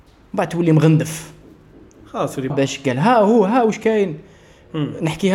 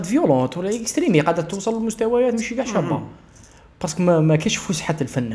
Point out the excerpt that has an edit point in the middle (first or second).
first